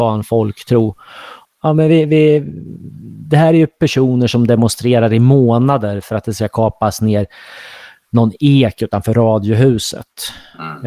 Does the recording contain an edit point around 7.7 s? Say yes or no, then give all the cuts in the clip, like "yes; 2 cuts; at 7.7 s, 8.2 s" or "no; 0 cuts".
no; 1 cut; at 1.4 s